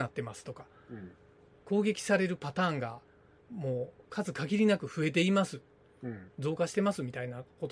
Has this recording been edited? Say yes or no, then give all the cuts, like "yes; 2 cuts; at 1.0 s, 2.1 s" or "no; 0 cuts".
no; 0 cuts